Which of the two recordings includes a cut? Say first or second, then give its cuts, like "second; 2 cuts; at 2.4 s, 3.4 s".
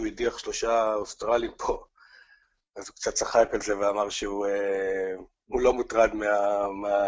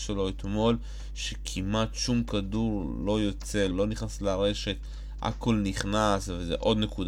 second; 1 cut; at 3.7 s